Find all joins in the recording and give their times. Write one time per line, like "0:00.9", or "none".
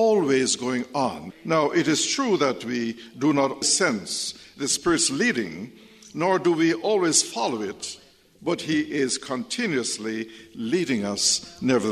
0:01.3
0:03.6